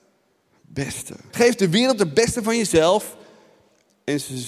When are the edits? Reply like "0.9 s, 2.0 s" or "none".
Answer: 1.3 s

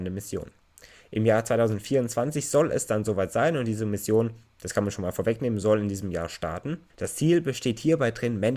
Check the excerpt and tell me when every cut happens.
6.9 s

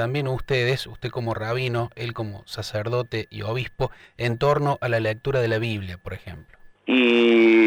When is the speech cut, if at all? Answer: 6.7 s

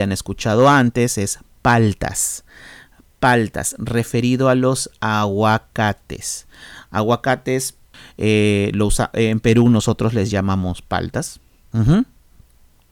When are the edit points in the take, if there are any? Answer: 11.7 s

